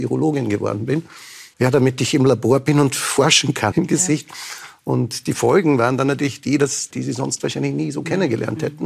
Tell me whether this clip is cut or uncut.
cut